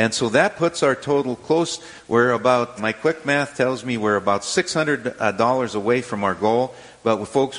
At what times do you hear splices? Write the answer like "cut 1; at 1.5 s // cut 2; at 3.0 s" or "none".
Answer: cut 1; at 2.8 s